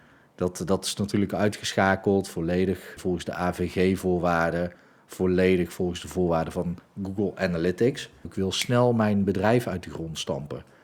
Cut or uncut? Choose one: cut